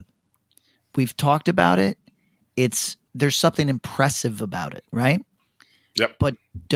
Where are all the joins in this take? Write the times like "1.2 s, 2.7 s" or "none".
3.1 s, 4.9 s